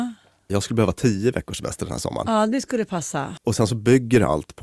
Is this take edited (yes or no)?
yes